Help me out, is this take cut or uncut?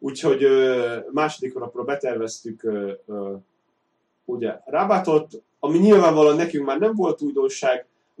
cut